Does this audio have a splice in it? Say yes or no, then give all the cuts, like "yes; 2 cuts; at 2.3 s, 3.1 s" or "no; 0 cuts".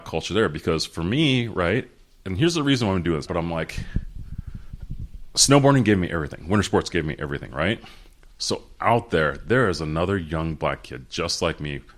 yes; 1 cut; at 3.3 s